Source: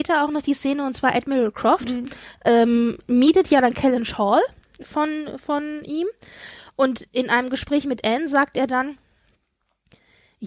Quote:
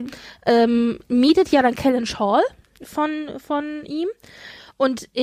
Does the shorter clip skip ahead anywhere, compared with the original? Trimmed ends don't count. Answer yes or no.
no